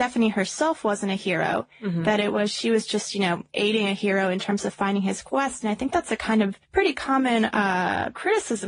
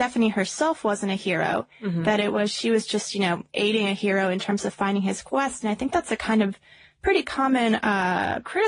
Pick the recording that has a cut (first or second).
first